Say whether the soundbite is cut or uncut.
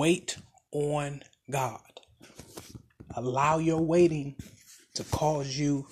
uncut